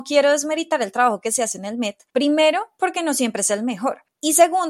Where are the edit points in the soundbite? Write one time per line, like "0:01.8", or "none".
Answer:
0:02.1